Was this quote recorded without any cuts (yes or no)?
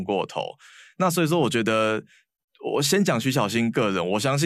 yes